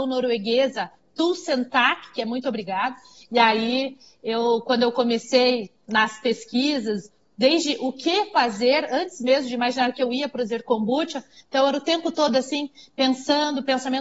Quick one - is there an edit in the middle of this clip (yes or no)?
no